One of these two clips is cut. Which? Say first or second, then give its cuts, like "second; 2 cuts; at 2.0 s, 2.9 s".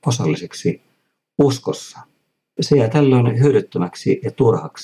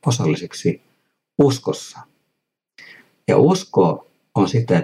first; 1 cut; at 2.6 s